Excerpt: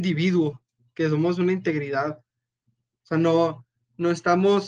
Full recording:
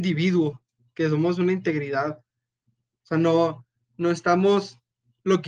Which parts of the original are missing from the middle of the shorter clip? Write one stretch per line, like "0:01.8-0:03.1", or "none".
none

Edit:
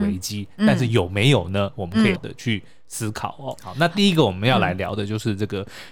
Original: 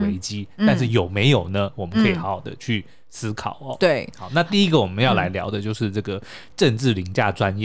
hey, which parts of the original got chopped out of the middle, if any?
0:02.2-0:02.4
0:03.8-0:04.1

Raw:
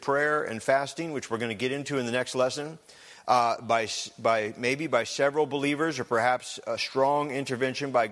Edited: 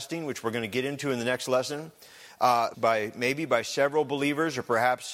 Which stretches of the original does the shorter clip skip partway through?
0:03.6-0:04.2

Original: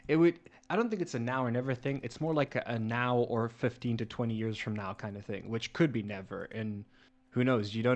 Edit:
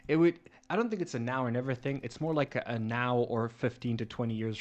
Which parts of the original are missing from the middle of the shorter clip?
none

